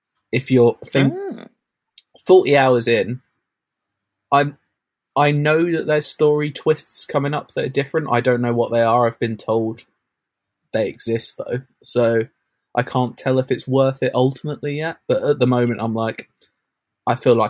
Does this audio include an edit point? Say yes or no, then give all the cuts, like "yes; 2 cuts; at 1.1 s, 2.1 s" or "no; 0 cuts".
no; 0 cuts